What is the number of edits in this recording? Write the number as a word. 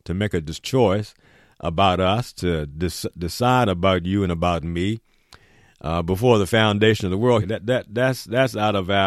one